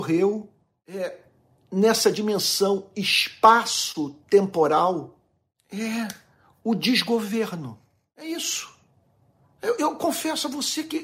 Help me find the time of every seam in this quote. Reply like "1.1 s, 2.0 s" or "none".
9.8 s